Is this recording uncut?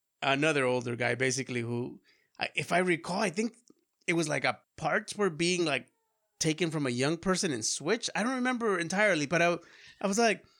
yes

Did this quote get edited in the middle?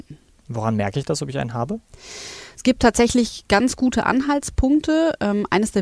no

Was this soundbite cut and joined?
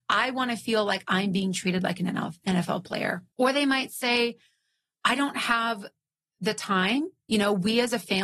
yes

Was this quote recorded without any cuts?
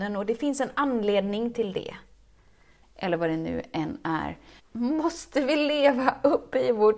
no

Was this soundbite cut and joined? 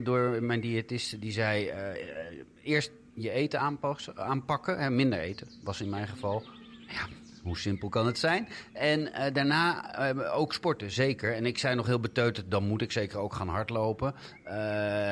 no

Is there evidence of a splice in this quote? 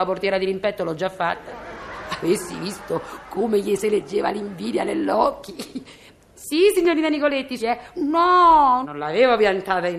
yes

